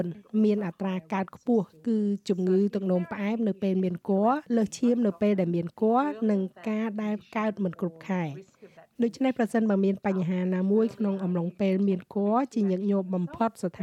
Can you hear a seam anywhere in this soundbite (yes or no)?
yes